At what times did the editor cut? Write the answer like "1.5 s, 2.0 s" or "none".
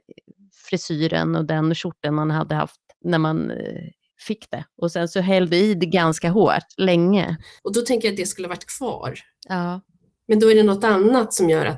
7.6 s